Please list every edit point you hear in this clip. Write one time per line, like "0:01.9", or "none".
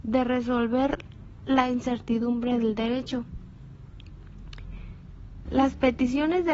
0:05.5